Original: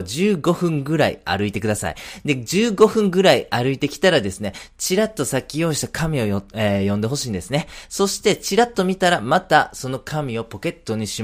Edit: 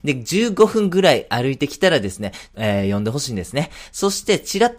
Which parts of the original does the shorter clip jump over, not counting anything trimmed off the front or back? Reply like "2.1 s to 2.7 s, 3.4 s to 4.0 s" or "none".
4.7 s to 6.5 s